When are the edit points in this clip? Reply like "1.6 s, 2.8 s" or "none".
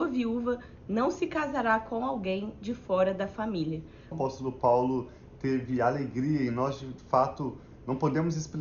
4.1 s